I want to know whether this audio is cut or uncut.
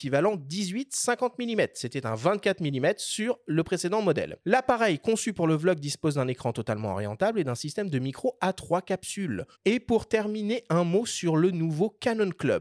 cut